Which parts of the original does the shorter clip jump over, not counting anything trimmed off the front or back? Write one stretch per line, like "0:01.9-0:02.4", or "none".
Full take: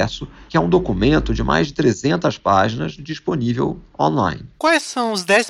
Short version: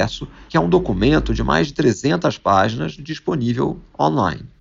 none